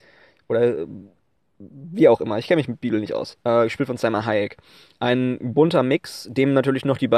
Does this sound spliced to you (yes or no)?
no